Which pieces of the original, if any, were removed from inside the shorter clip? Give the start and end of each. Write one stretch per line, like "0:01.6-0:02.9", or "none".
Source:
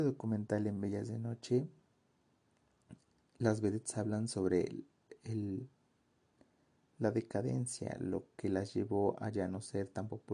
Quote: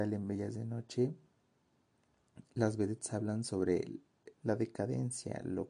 0:03.0-0:03.3
0:05.2-0:06.9